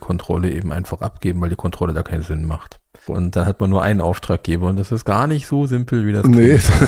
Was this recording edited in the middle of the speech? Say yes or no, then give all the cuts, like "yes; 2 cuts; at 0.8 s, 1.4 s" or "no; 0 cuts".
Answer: yes; 1 cut; at 3.1 s